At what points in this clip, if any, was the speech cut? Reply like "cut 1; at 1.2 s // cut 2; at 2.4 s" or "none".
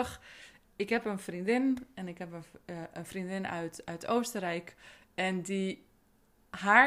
none